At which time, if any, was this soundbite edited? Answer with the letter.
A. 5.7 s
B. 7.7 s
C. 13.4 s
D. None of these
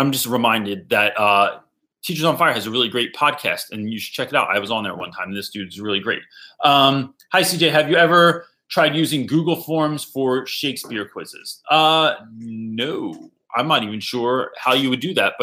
D